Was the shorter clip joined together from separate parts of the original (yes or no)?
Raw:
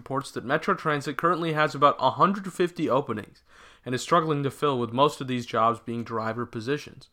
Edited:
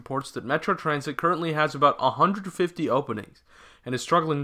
no